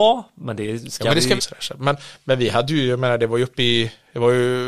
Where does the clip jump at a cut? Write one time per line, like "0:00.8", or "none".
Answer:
0:01.4